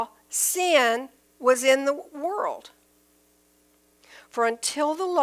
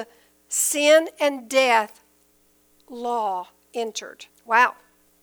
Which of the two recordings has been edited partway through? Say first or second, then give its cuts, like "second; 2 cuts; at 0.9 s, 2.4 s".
second; 1 cut; at 4.3 s